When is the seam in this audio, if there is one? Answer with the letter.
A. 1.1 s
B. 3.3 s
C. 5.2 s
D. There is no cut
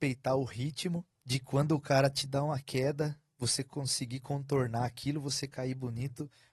A